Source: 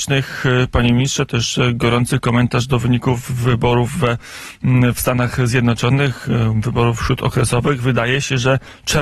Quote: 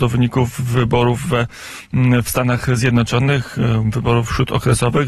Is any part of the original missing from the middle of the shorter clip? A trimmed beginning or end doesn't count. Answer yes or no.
no